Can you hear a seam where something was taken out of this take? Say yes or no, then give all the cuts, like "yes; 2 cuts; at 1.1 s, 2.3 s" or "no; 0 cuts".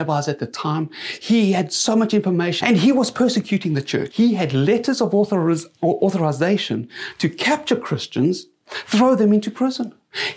yes; 2 cuts; at 2.6 s, 4.1 s